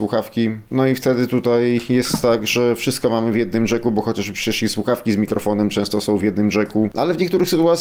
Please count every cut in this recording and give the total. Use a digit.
0